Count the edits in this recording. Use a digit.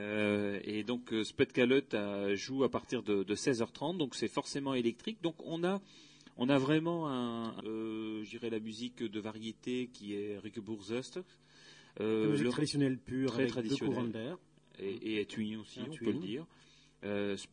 1